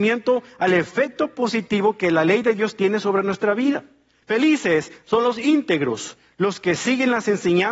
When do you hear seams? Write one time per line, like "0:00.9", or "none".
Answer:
0:04.2

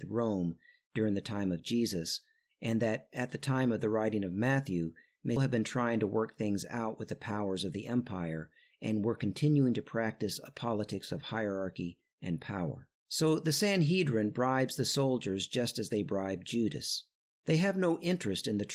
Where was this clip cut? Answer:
0:05.4
0:13.0
0:17.3

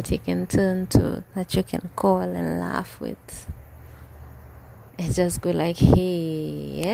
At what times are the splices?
0:04.9

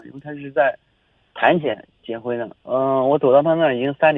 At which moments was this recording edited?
0:02.6

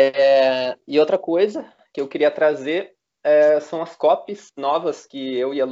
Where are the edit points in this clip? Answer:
none

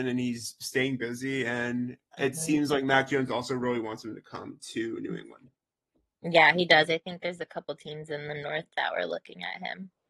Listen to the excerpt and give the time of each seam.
none

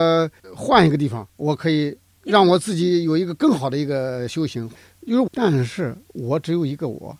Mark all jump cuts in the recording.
0:01.3
0:05.3

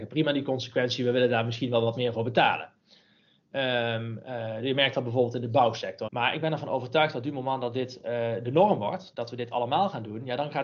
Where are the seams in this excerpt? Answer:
0:06.1

